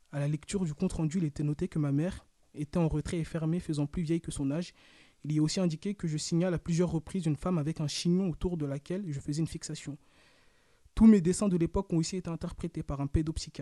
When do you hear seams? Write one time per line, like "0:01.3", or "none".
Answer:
none